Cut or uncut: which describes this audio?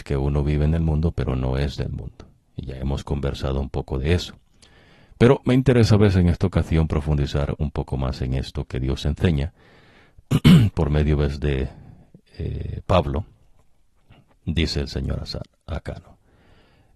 uncut